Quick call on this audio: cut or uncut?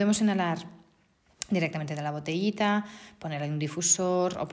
uncut